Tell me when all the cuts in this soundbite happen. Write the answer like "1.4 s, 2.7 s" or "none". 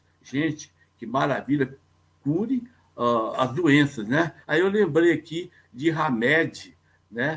4.4 s